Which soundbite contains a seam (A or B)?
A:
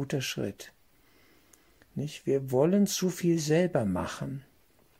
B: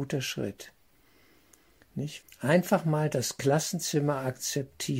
B